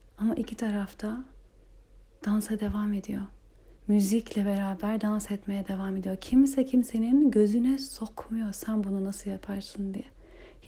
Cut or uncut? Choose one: uncut